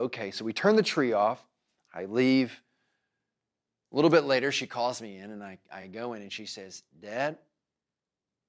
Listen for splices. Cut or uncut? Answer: uncut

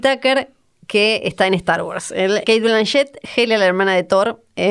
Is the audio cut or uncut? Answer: cut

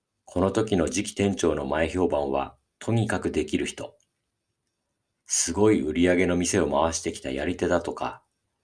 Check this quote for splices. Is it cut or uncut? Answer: uncut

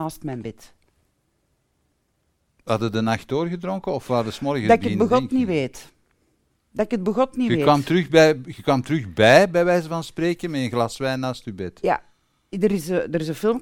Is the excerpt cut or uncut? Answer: uncut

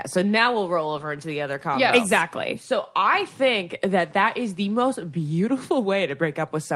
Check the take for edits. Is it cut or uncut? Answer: uncut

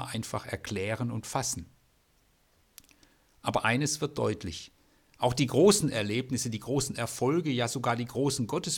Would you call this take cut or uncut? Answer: uncut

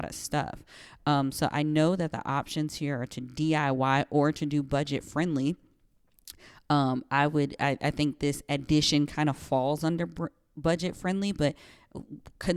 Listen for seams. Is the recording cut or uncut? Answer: uncut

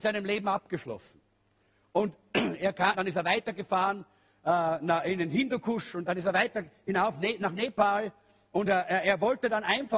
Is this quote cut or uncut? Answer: cut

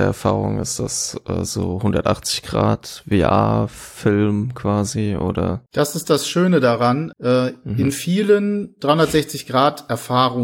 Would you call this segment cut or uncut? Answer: cut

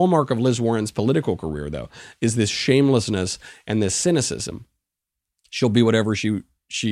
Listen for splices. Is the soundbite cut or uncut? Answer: uncut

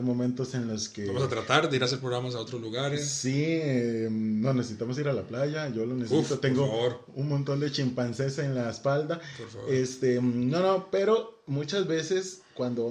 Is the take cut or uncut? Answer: uncut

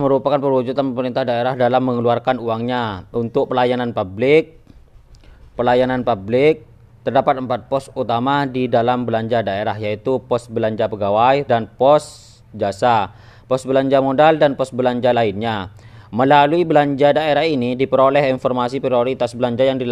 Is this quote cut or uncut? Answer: cut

